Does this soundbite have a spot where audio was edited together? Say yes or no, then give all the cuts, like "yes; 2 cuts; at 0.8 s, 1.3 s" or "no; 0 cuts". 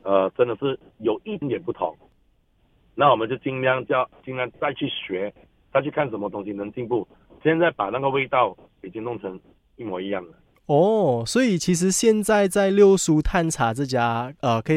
yes; 2 cuts; at 1.4 s, 4.5 s